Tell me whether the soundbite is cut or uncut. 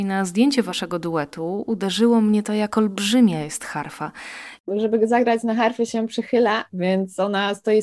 cut